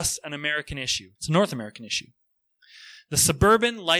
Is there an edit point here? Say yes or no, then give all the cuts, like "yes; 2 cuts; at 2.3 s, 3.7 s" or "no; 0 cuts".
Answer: yes; 1 cut; at 1.1 s